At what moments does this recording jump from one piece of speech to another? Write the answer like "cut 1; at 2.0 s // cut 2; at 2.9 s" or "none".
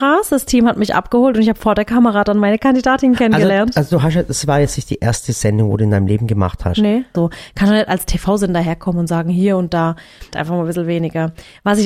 cut 1; at 7.1 s // cut 2; at 10.3 s